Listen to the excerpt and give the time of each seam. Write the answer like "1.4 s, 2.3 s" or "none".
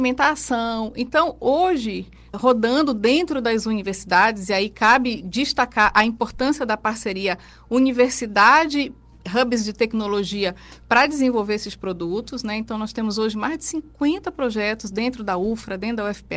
2.3 s